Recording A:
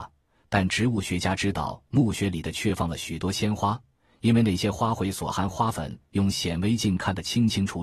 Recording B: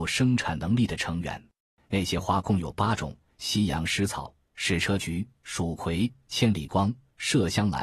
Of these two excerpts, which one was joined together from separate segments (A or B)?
B